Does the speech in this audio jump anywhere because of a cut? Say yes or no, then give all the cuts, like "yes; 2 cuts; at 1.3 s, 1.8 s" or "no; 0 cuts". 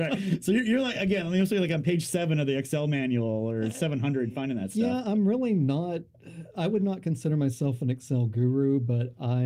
no; 0 cuts